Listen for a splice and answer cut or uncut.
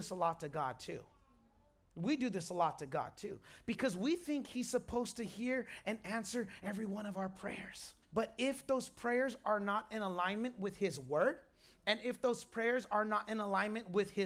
cut